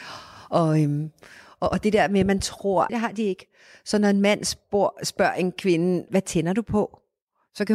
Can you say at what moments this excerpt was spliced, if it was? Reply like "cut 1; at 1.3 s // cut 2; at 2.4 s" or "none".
cut 1; at 2.9 s // cut 2; at 6.1 s